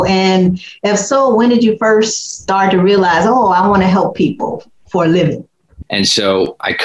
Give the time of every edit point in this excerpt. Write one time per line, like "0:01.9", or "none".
0:05.8